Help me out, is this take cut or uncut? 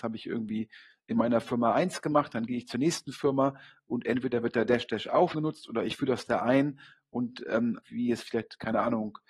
cut